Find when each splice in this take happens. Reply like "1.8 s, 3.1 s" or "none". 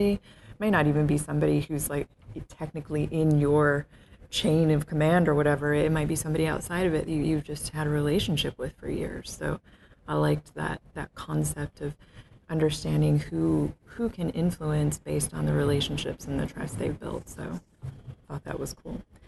none